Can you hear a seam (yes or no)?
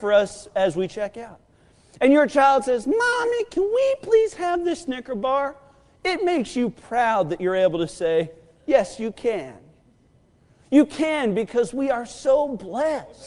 no